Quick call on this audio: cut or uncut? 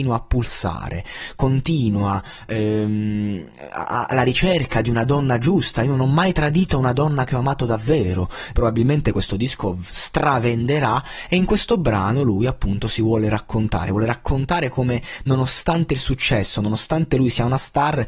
cut